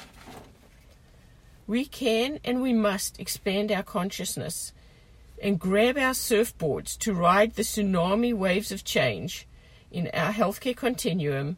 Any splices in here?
yes; 1 cut; at 1.6 s

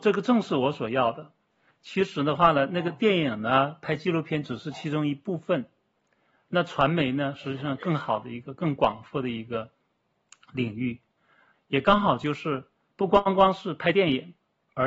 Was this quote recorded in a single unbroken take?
no; 1 cut; at 11.5 s

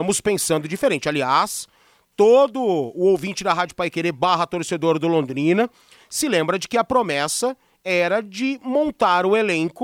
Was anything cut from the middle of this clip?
no; 0 cuts

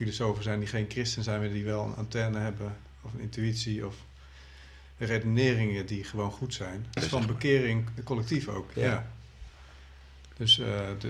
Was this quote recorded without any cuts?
no; 2 cuts; at 7.0 s, 8.7 s

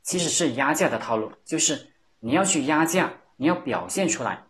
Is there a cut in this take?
yes; 1 cut; at 3.3 s

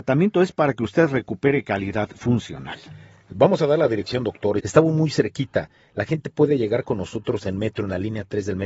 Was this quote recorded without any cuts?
no; 1 cut; at 4.6 s

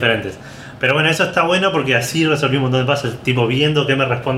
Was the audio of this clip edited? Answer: no; 0 cuts

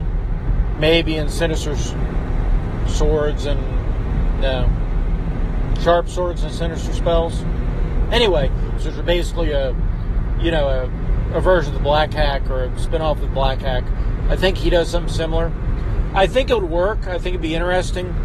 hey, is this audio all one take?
no; 1 cut; at 8.8 s

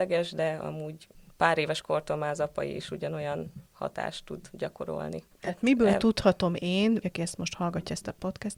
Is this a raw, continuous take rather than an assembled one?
no; 2 cuts; at 5.3 s, 7.0 s

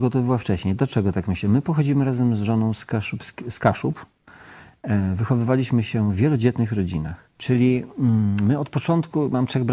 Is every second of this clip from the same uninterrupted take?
no; 1 cut; at 7.3 s

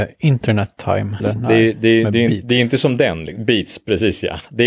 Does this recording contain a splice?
yes; 1 cut; at 1.2 s

